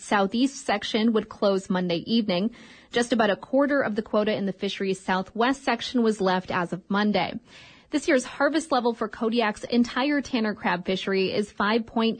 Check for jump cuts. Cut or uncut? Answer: uncut